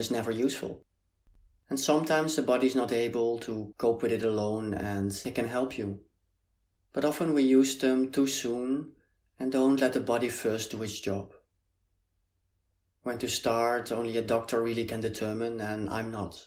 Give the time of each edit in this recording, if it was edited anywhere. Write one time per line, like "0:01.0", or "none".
none